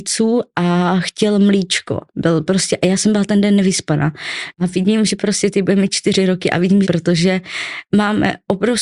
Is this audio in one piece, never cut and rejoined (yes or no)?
no